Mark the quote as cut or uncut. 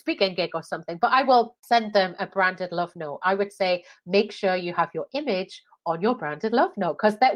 cut